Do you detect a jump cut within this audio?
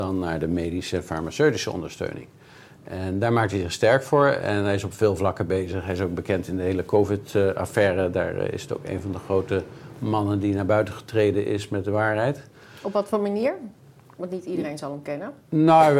no; 0 cuts

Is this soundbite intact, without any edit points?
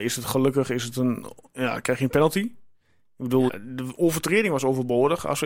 no; 1 cut; at 3.5 s

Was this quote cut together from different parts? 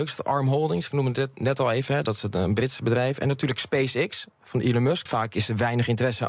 yes; 1 cut; at 5.1 s

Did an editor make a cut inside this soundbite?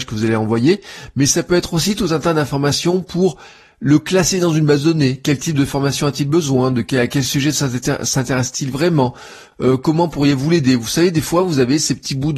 no; 0 cuts

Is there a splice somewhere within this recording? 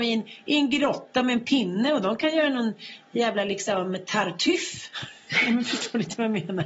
no; 0 cuts

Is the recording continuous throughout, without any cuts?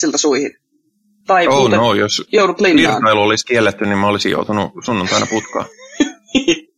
yes; 0 cuts

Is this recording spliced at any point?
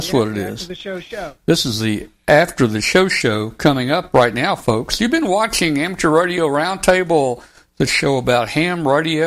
no; 0 cuts

